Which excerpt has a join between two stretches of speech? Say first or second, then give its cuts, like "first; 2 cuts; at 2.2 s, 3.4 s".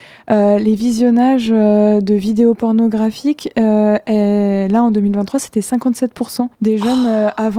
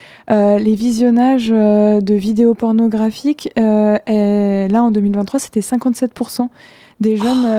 first; 1 cut; at 6.5 s